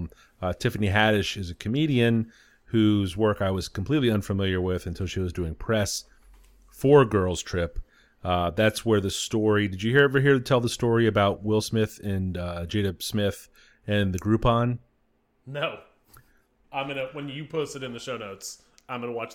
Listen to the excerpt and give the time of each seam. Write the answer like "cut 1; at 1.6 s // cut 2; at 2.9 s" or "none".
none